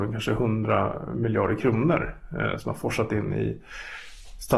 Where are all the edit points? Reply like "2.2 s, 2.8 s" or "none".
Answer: none

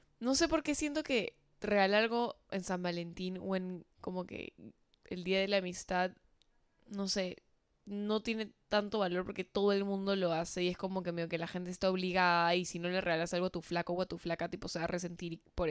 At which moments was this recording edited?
1.5 s

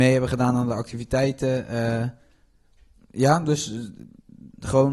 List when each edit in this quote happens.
none

